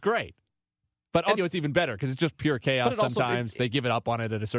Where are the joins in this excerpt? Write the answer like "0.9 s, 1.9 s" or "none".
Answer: 1.4 s